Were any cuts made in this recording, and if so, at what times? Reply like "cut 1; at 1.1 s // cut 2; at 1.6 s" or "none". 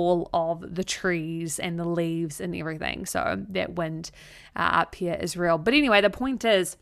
none